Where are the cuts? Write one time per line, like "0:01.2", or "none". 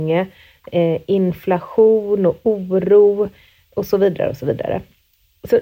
none